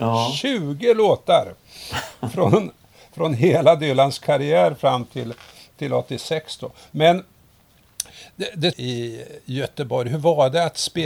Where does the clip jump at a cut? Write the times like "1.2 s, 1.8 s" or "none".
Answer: 8.7 s